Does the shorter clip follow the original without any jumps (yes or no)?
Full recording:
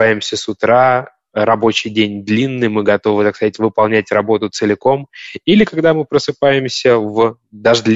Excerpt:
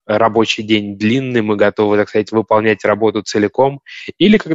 yes